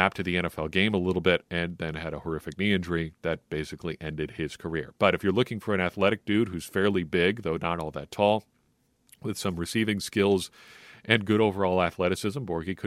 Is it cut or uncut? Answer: uncut